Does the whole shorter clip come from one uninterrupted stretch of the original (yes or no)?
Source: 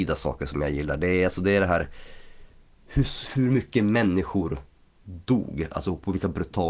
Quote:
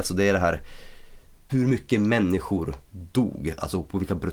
no